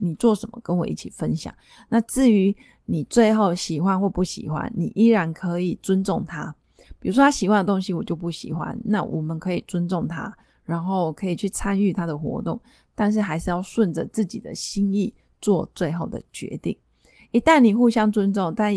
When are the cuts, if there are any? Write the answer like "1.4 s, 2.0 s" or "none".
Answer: none

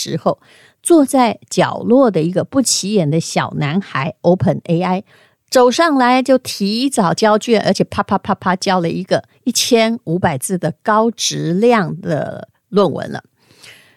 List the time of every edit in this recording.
none

